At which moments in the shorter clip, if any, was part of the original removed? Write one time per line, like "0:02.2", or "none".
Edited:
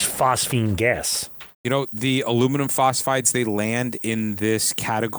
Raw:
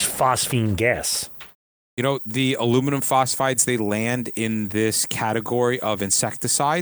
0:01.5